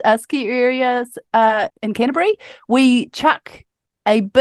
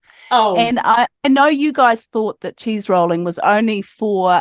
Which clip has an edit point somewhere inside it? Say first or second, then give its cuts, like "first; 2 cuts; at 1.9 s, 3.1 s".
first; 1 cut; at 1.7 s